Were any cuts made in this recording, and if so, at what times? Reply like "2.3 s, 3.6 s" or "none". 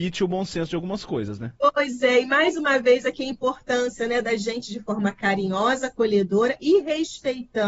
1.6 s